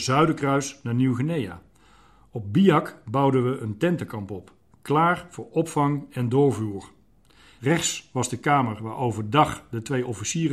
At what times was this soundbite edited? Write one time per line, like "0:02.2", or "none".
0:07.6